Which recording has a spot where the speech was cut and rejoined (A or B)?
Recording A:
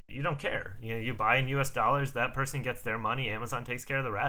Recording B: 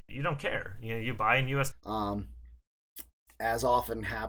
B